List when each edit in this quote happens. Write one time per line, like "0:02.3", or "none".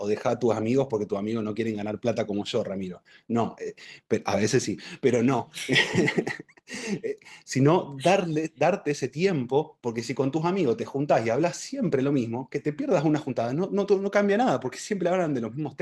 none